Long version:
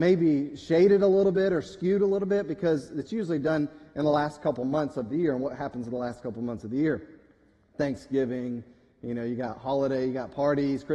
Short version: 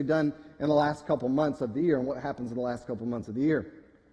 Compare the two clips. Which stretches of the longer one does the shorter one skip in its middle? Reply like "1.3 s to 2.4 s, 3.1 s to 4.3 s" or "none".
none